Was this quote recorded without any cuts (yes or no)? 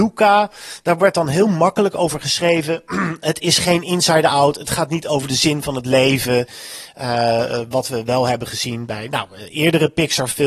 yes